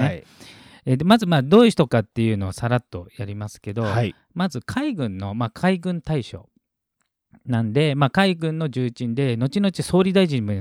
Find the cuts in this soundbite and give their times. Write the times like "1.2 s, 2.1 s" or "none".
none